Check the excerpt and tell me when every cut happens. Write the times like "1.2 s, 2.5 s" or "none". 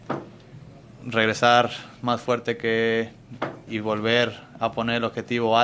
3.7 s